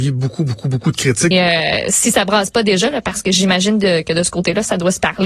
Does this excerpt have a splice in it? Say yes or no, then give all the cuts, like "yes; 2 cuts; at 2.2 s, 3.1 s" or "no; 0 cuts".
yes; 1 cut; at 1.3 s